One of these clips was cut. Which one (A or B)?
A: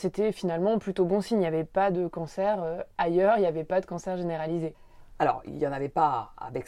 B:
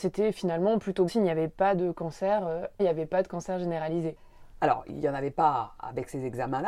B